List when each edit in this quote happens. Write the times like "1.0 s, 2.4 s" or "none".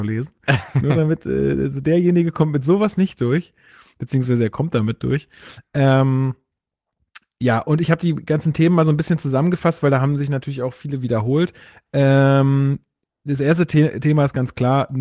none